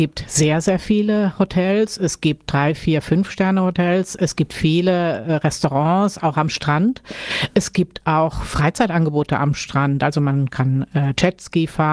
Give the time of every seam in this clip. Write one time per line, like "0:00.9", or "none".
none